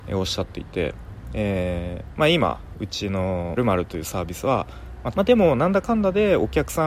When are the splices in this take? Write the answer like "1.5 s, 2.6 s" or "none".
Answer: 3.6 s, 5.1 s